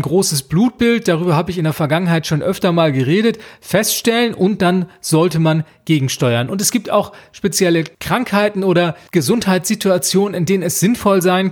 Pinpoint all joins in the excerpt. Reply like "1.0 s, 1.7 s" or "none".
none